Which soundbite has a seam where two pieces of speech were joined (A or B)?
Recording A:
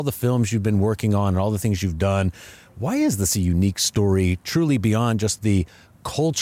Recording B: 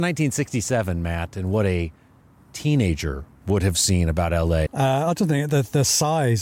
B